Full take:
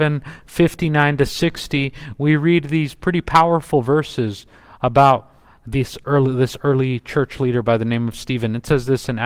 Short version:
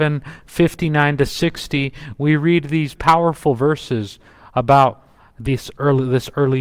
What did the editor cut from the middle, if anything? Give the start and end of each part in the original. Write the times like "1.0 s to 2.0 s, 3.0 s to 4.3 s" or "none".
3.0 s to 3.2 s